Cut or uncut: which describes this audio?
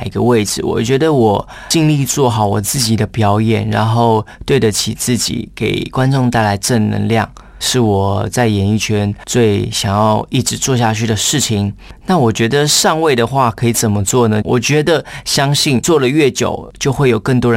cut